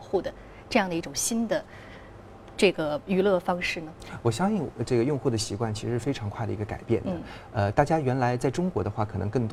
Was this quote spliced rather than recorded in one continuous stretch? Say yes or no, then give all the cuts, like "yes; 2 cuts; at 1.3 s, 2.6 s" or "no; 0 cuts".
no; 0 cuts